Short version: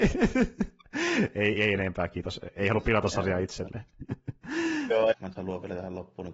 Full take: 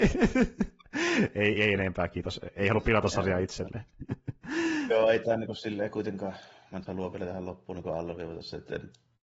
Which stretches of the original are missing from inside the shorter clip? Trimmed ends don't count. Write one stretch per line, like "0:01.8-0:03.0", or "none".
0:05.1-0:06.6